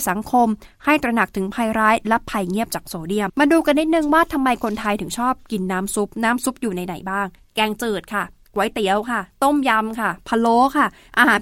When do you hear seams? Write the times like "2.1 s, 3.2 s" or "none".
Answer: 3.3 s